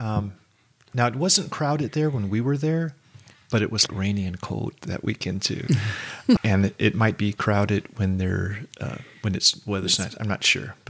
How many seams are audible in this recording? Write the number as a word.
two